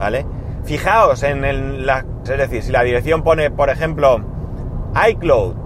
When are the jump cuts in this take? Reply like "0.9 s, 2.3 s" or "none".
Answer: 2.3 s